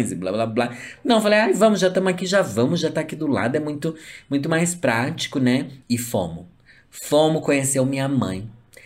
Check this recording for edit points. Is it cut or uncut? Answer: uncut